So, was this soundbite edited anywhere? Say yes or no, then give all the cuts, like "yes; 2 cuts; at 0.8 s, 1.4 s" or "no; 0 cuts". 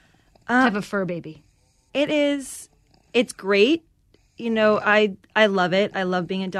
no; 0 cuts